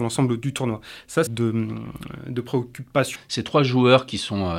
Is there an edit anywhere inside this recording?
yes; 2 cuts; at 1.3 s, 3.2 s

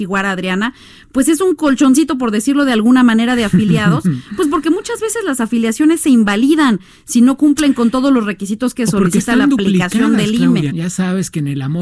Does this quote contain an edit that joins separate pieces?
yes; 1 cut; at 10.7 s

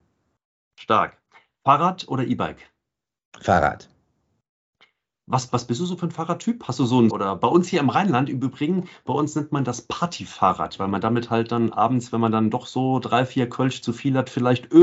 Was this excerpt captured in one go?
no; 1 cut; at 7.1 s

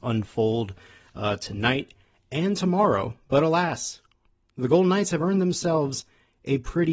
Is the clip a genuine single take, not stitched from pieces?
yes; 0 cuts

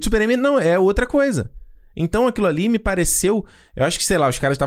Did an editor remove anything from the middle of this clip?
no; 0 cuts

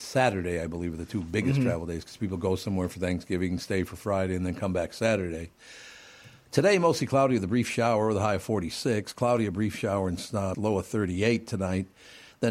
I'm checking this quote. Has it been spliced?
yes; 1 cut; at 10.5 s

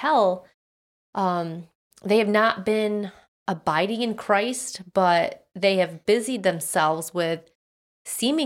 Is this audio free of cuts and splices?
yes; 0 cuts

